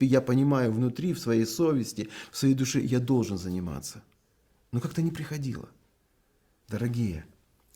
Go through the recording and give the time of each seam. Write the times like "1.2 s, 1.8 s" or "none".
6.6 s